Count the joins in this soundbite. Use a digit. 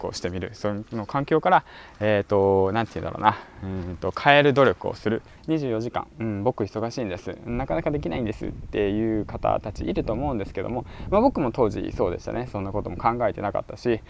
1